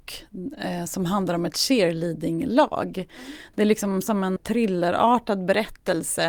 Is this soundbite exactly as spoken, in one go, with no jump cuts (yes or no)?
no